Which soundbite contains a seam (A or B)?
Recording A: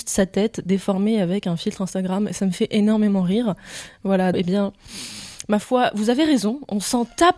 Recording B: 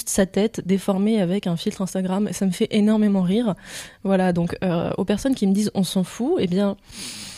A